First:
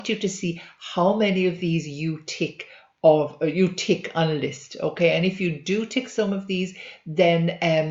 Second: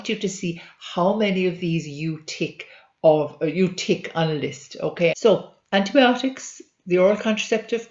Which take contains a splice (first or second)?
second